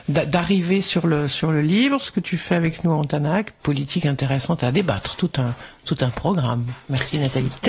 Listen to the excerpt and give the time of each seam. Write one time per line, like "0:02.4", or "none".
0:03.6